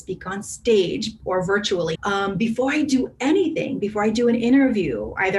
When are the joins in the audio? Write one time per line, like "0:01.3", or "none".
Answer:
0:01.9